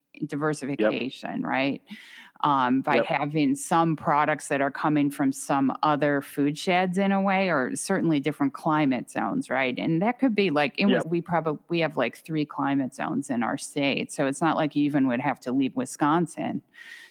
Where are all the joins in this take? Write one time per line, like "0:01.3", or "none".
0:11.0